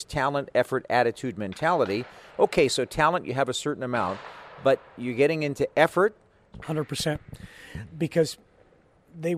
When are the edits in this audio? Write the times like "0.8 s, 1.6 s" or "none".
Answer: 6.5 s